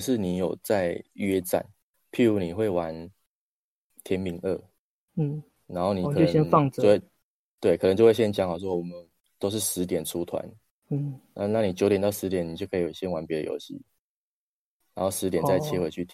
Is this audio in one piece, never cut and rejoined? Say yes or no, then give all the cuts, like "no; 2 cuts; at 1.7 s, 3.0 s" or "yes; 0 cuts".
yes; 0 cuts